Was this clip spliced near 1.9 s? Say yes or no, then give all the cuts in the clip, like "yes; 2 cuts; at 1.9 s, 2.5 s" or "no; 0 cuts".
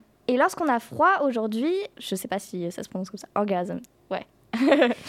yes; 1 cut; at 1.9 s